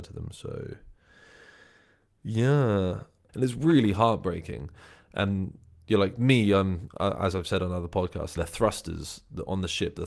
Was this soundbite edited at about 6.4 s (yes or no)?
no